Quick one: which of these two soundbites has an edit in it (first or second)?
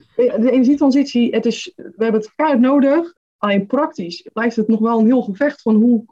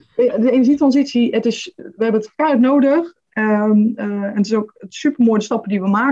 first